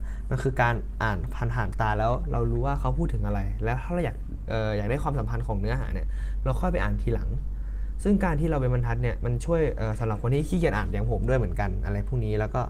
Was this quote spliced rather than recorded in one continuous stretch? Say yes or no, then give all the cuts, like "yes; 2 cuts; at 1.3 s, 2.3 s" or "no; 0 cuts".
no; 0 cuts